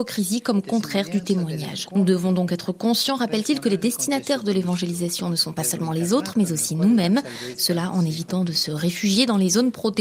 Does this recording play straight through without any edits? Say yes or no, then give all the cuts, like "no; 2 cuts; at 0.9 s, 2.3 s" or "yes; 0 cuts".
yes; 0 cuts